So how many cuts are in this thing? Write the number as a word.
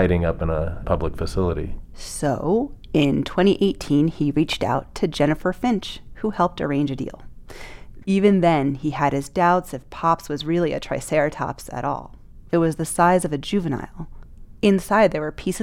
three